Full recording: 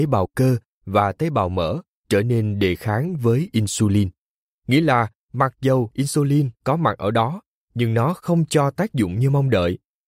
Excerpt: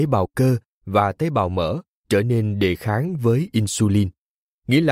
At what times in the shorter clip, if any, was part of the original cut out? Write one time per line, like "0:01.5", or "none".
none